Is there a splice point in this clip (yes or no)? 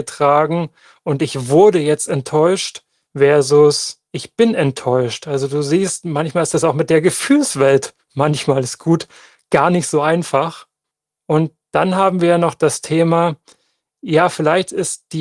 no